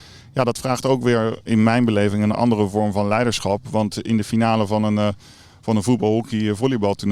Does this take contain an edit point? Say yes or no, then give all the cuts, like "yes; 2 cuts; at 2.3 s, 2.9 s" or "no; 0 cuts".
yes; 1 cut; at 2.3 s